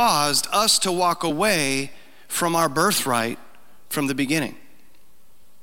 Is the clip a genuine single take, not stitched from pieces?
yes; 0 cuts

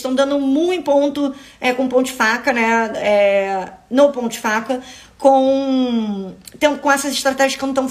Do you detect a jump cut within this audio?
no; 0 cuts

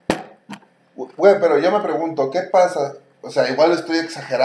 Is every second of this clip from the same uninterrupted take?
yes; 0 cuts

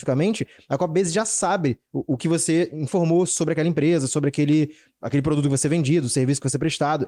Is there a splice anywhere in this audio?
no; 0 cuts

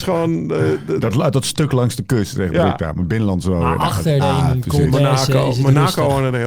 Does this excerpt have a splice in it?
yes; 1 cut; at 4.2 s

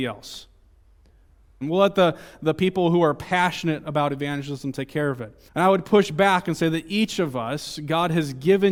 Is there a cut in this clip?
yes; 2 cuts; at 1.6 s, 5.5 s

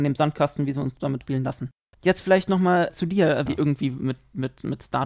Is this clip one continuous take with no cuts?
no; 2 cuts; at 1.9 s, 3.5 s

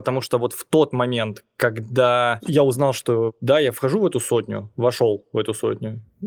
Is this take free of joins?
yes; 0 cuts

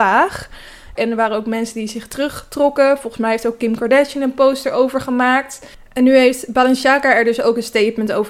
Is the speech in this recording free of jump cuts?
no; 1 cut; at 1.0 s

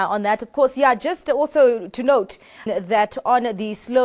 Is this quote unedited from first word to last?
no; 1 cut; at 2.7 s

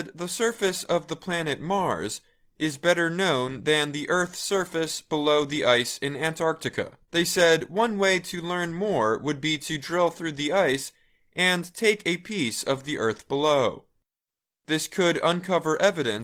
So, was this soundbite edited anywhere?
yes; 1 cut; at 7.0 s

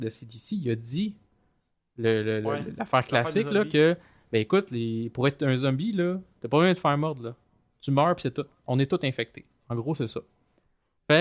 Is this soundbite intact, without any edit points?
yes; 0 cuts

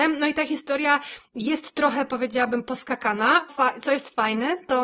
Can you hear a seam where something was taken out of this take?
yes; 1 cut; at 3.5 s

